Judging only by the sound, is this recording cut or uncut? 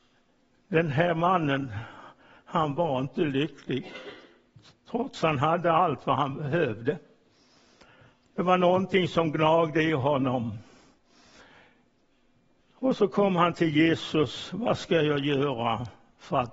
uncut